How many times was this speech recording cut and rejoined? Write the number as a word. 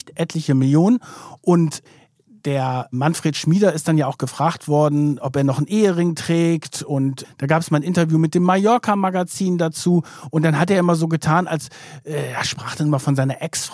zero